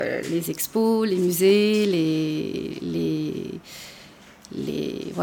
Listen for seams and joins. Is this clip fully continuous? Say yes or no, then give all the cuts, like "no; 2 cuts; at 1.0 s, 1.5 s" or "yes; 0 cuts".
yes; 0 cuts